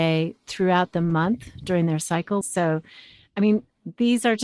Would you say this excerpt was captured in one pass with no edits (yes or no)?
no